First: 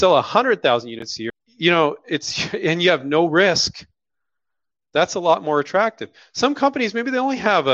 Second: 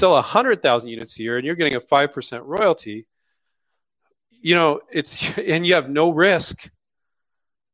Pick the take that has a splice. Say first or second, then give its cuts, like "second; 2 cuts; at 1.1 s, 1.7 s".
first; 1 cut; at 1.3 s